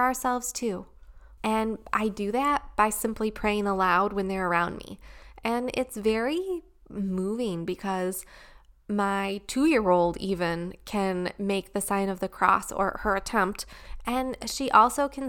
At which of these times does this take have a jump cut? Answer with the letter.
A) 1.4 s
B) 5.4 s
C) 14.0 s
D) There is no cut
A